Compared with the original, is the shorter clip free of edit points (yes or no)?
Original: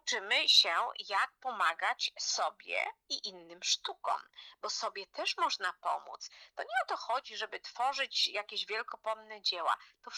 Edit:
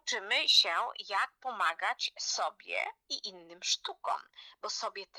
yes